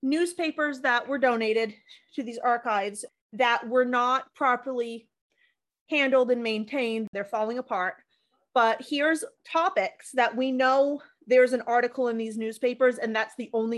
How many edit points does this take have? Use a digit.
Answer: 2